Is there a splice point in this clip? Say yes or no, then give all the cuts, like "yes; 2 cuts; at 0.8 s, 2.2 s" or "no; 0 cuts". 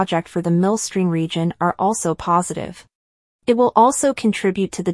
yes; 1 cut; at 3.3 s